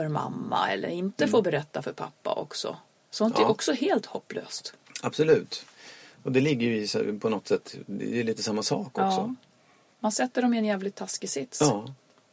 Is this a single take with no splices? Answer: yes; 0 cuts

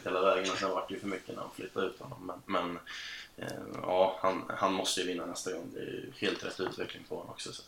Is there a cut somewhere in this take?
no; 0 cuts

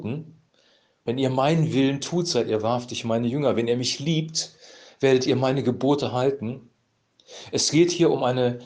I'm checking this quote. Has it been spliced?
no; 0 cuts

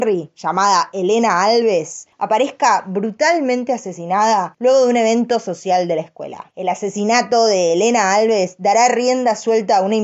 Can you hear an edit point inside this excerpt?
no; 0 cuts

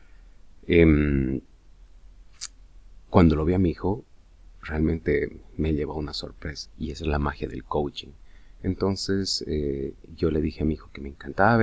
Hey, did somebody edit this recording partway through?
yes; 1 cut; at 6.7 s

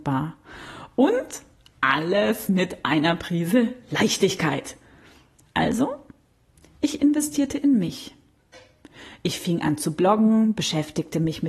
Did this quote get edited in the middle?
no; 0 cuts

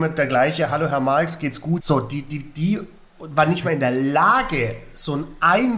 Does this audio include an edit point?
yes; 1 cut; at 1.8 s

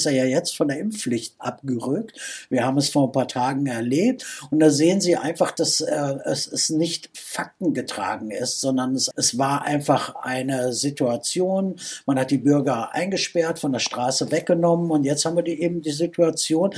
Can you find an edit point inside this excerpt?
yes; 1 cut; at 9.1 s

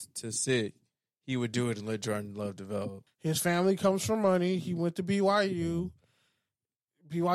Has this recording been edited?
yes; 1 cut; at 3.1 s

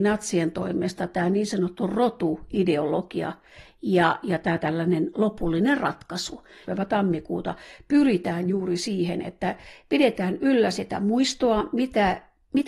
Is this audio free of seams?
no; 1 cut; at 6.6 s

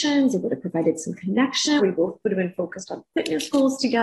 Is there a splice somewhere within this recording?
yes; 1 cut; at 1.8 s

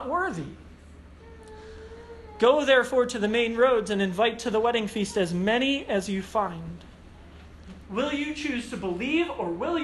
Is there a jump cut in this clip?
yes; 1 cut; at 7.8 s

